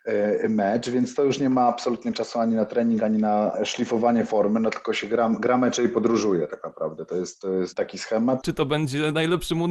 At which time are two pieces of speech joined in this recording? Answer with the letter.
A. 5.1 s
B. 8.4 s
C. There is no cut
B